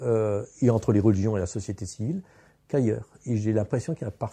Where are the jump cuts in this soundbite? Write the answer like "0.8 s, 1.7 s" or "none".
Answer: none